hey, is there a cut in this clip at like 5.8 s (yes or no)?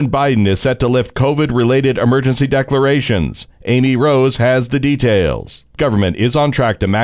yes